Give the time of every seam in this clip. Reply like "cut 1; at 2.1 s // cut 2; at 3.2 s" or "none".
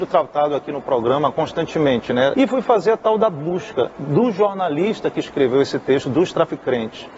cut 1; at 2.3 s